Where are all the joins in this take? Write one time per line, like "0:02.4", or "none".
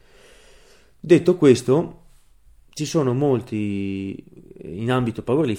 none